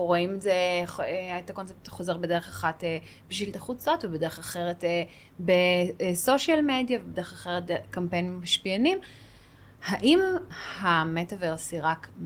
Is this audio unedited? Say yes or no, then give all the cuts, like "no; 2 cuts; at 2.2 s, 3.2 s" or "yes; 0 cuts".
yes; 0 cuts